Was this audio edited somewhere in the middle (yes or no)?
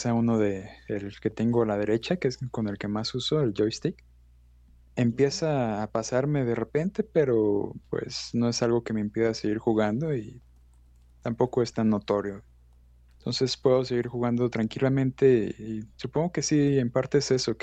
yes